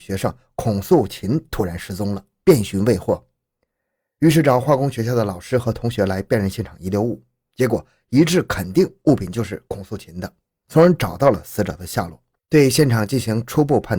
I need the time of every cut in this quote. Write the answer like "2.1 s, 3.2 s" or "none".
12.4 s